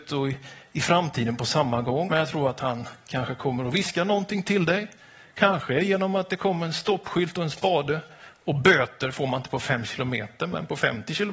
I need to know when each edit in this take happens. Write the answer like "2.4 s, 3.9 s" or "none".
2.1 s